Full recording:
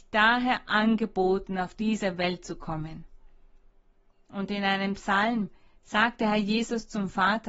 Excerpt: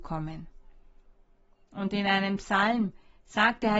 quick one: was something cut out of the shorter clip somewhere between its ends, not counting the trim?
no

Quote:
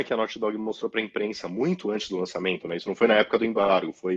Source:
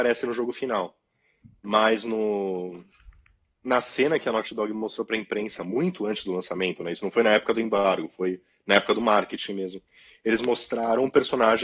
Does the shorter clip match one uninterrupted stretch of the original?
yes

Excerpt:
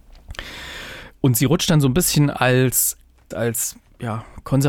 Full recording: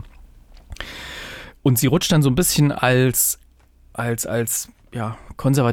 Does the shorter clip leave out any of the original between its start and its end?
yes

